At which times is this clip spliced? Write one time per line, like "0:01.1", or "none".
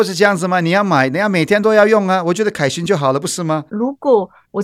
0:03.7